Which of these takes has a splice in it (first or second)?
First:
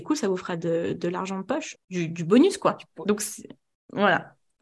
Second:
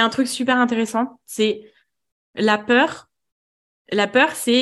first